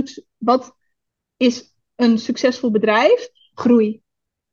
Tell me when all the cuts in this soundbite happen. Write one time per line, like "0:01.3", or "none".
0:03.5